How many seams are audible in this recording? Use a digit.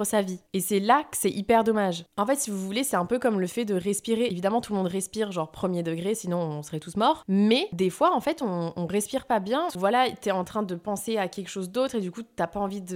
2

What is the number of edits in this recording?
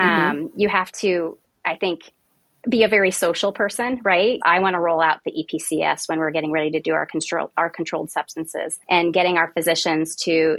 2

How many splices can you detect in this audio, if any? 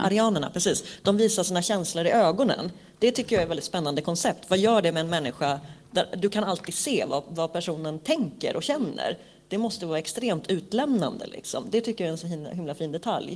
0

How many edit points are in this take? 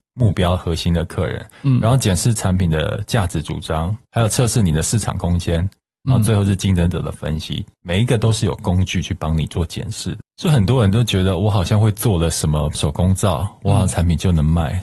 2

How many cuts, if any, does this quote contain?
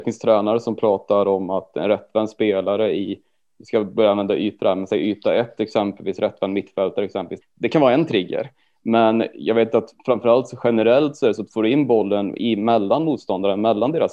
2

